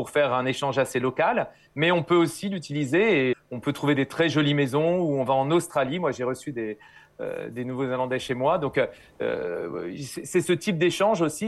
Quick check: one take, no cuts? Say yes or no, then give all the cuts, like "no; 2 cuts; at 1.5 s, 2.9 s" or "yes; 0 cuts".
no; 1 cut; at 3.3 s